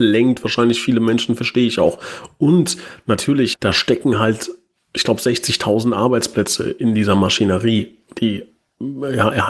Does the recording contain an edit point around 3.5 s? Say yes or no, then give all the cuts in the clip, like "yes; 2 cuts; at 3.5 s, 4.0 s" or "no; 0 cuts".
yes; 1 cut; at 3.5 s